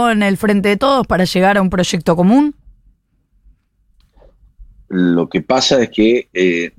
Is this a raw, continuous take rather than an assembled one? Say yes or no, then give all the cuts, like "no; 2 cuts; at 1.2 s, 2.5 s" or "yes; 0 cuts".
no; 1 cut; at 4.9 s